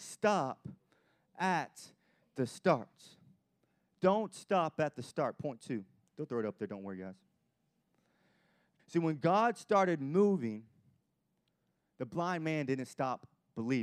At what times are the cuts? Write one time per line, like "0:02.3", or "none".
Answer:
0:08.8